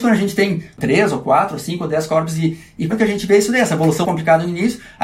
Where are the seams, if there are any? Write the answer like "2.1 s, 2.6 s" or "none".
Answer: 2.9 s, 4.0 s

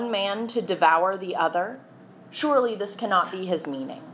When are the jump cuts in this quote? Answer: none

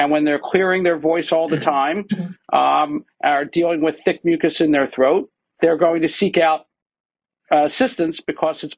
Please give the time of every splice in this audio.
5.6 s

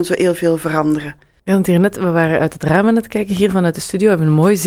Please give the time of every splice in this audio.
1.4 s

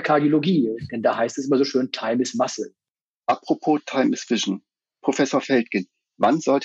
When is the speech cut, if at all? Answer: none

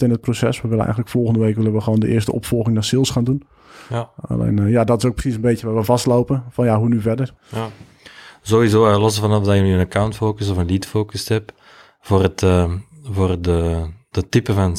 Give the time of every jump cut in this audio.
7.4 s

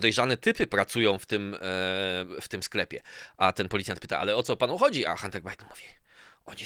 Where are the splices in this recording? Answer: none

